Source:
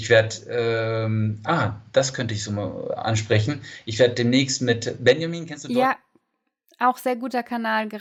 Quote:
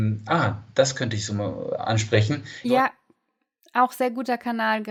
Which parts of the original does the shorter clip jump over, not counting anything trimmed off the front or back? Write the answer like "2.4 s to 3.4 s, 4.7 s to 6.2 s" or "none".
3.8 s to 5.7 s